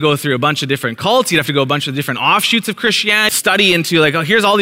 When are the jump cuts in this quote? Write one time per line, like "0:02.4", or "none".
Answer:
0:03.3